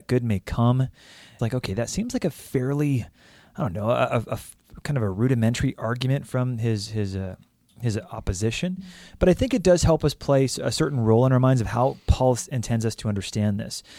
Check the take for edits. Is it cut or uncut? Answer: cut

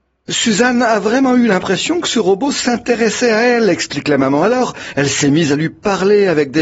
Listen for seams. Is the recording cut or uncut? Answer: uncut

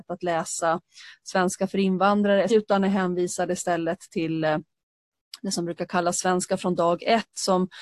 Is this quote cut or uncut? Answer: cut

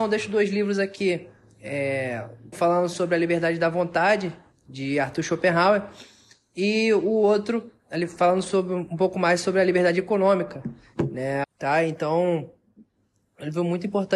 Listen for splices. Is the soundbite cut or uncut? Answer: cut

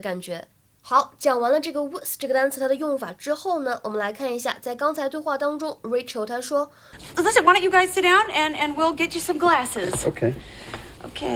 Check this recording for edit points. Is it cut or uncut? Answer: uncut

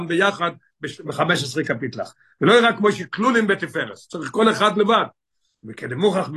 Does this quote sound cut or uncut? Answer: uncut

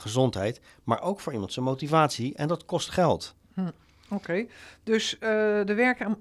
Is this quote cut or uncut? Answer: uncut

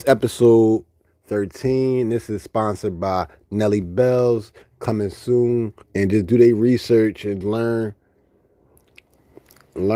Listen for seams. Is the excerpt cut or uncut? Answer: cut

